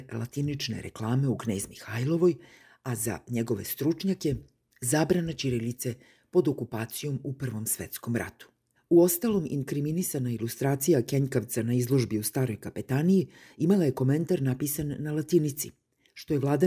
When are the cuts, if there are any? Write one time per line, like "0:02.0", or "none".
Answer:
none